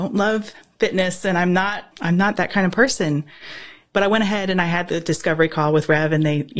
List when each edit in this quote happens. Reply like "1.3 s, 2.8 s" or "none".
1.9 s